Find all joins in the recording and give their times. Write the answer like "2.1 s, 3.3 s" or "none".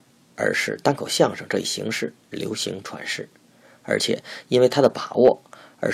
none